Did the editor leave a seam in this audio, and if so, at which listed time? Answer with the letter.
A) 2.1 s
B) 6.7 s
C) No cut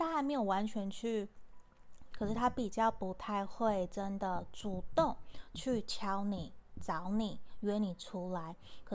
A